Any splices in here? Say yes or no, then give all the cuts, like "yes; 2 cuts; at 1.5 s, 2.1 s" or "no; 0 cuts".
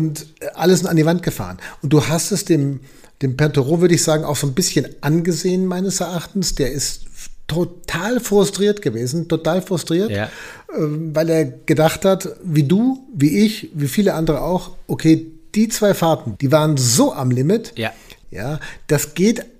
yes; 2 cuts; at 16.4 s, 18.2 s